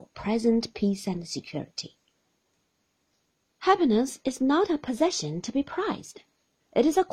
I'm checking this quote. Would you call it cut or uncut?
uncut